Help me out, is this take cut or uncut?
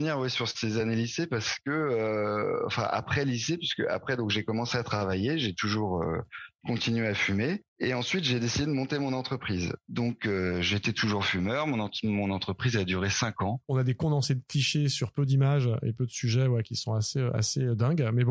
cut